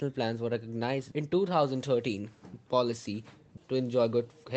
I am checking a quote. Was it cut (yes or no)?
yes